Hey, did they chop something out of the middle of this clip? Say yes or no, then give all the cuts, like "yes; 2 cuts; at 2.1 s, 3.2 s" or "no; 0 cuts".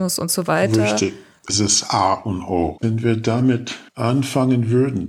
yes; 1 cut; at 1.5 s